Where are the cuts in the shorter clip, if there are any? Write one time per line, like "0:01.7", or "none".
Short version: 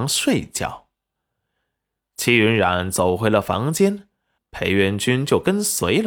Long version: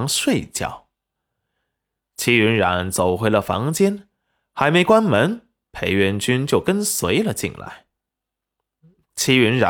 0:04.4